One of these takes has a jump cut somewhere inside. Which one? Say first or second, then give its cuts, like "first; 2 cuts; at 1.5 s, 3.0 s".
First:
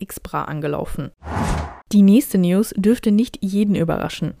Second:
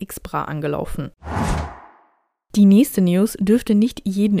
first; 1 cut; at 1.8 s